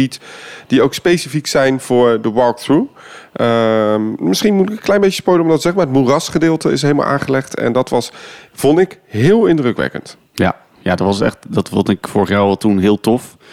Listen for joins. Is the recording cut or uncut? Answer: uncut